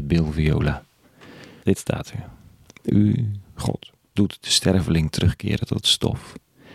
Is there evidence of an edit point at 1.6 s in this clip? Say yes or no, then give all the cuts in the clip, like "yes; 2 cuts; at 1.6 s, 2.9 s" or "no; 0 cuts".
yes; 1 cut; at 1.6 s